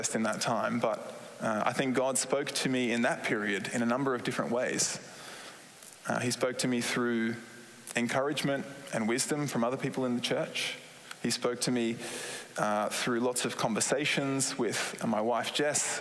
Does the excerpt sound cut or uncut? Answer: uncut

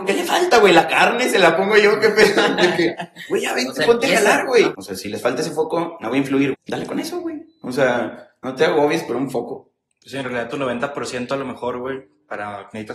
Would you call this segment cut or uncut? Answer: cut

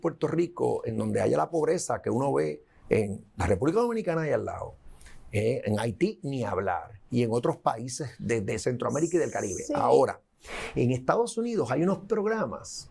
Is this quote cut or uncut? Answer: uncut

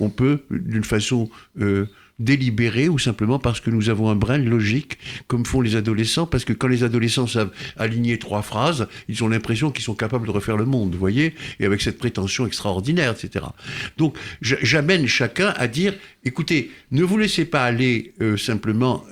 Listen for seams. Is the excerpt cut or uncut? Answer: uncut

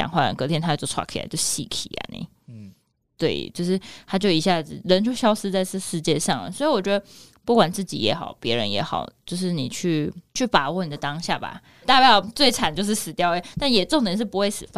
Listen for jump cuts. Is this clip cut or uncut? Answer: cut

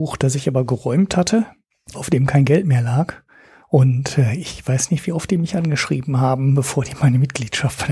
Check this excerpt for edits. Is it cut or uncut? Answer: cut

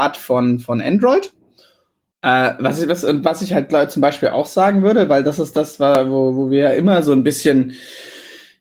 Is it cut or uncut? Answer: cut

